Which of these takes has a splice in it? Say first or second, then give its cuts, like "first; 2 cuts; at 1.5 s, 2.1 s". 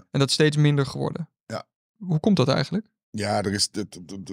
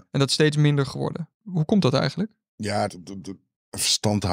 second; 2 cuts; at 1.3 s, 2.9 s